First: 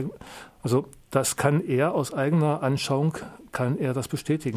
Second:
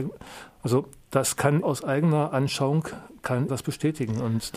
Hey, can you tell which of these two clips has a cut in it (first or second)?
second